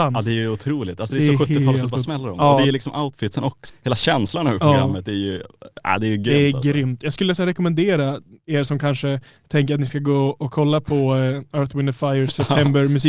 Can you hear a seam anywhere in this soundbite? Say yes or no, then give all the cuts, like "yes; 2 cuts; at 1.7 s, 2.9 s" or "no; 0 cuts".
yes; 1 cut; at 3.7 s